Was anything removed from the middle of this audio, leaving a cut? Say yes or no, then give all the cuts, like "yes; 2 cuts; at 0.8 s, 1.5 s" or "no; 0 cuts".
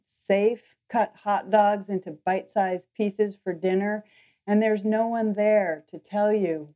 no; 0 cuts